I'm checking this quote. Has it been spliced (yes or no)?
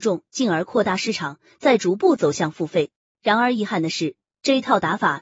no